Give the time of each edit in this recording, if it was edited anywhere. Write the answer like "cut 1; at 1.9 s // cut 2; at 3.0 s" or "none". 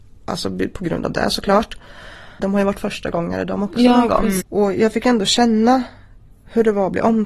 cut 1; at 2.4 s // cut 2; at 4.4 s